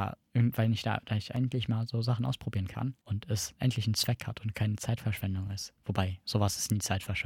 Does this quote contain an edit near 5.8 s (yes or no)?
no